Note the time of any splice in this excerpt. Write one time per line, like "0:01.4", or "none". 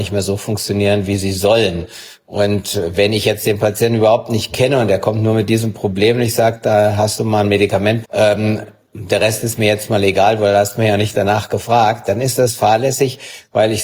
0:08.0